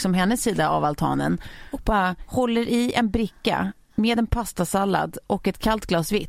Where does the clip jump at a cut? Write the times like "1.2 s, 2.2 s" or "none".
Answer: none